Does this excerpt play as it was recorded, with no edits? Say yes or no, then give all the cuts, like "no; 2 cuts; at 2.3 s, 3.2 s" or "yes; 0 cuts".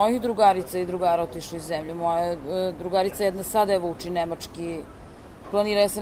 yes; 0 cuts